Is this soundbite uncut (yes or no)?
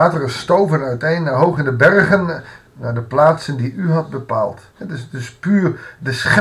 no